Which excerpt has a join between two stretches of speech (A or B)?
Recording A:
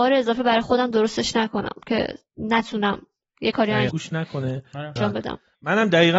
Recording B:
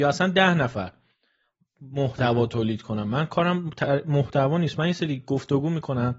A